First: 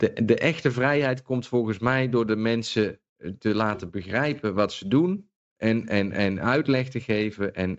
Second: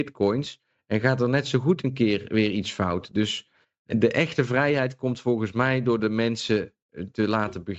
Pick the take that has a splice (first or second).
second